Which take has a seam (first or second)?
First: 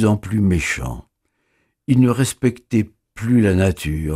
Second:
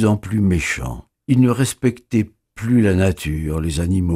second